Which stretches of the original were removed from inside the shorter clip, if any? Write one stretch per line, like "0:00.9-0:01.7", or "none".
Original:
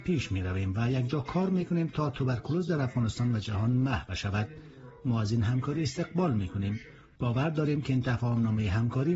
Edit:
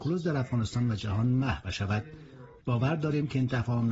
0:05.0-0:07.1